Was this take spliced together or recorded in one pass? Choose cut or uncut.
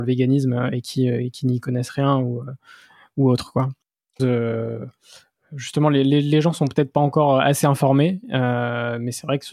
cut